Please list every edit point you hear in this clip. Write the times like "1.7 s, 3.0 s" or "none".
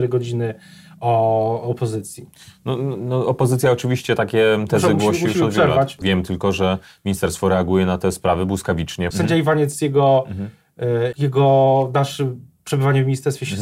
6.0 s, 9.1 s, 11.1 s